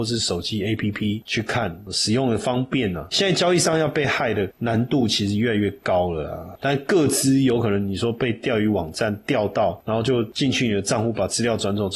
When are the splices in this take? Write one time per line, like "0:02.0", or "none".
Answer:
0:03.1